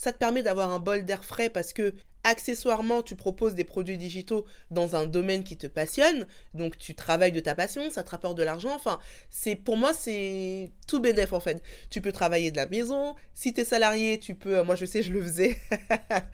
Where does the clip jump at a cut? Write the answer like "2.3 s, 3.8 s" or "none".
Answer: none